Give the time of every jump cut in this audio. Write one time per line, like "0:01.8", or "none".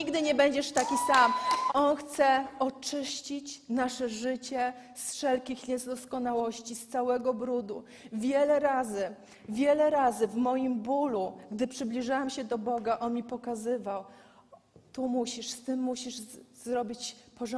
0:01.7